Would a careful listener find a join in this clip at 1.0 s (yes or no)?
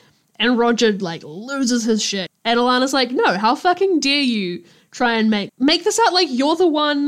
no